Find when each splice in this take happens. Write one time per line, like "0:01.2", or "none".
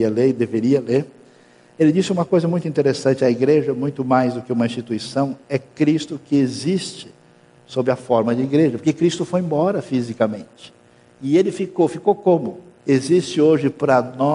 0:12.8